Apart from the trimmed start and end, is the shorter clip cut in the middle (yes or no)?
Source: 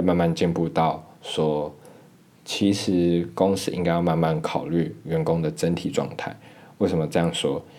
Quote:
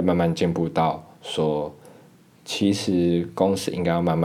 no